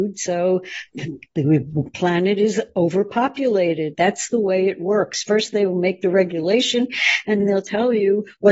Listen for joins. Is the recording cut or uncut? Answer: cut